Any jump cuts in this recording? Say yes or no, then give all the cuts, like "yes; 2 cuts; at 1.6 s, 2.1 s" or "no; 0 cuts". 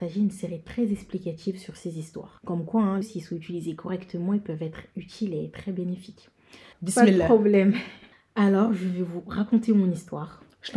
yes; 2 cuts; at 3.0 s, 6.7 s